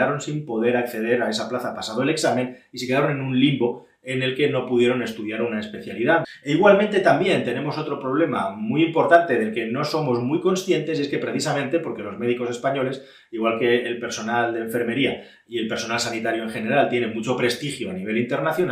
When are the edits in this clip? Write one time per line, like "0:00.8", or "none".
none

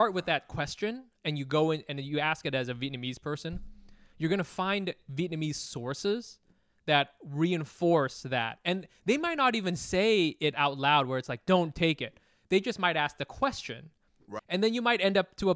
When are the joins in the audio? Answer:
0:14.4

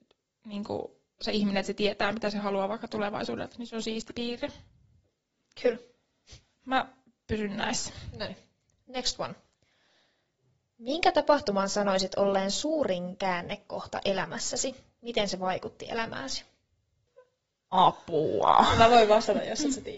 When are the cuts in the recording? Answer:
none

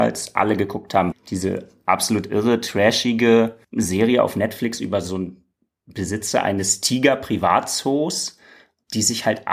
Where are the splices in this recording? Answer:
0:01.1
0:03.6

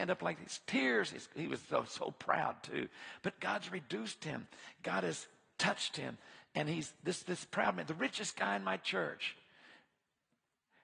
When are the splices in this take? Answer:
none

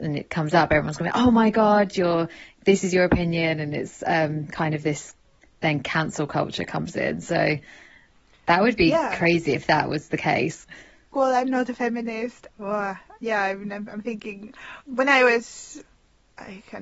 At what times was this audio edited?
0:11.1
0:12.5
0:14.8

